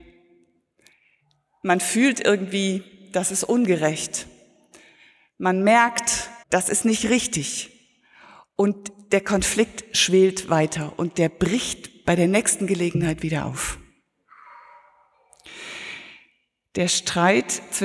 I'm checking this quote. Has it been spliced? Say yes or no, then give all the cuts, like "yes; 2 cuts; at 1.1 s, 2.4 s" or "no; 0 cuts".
yes; 1 cut; at 6.4 s